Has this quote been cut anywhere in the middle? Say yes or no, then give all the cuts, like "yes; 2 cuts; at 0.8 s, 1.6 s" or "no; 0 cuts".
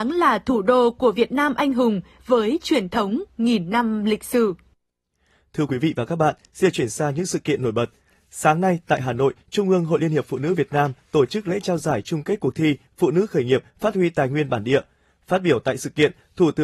no; 0 cuts